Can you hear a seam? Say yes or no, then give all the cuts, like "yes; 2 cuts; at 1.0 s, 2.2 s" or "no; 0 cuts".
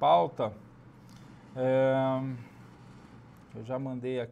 no; 0 cuts